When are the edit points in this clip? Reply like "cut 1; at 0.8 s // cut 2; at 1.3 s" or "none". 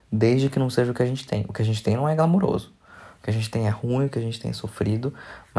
none